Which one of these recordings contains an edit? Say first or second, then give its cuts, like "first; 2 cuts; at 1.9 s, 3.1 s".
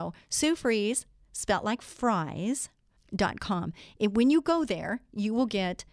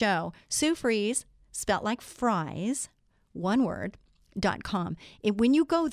first; 1 cut; at 3.0 s